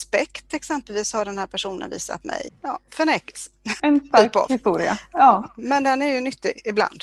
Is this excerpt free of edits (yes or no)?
no